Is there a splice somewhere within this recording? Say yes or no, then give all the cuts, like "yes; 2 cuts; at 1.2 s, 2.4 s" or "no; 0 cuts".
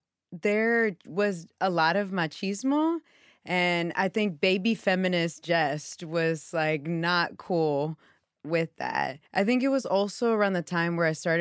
yes; 1 cut; at 9.3 s